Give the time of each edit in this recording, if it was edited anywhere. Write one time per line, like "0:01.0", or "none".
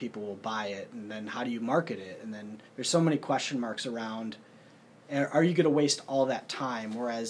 0:02.7